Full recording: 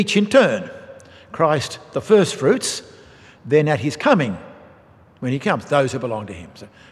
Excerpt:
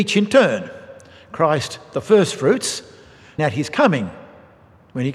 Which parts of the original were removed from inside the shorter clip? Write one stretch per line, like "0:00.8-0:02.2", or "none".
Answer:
0:03.4-0:03.7